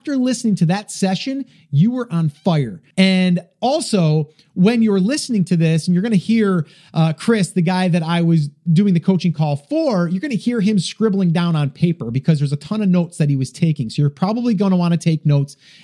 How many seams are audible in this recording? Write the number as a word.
one